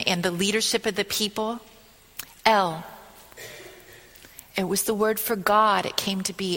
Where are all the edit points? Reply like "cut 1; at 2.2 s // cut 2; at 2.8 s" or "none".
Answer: none